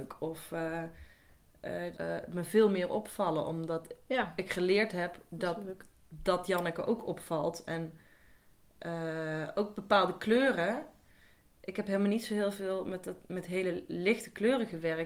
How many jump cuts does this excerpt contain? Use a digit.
1